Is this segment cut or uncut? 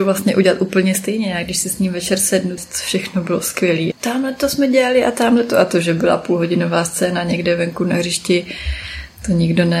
cut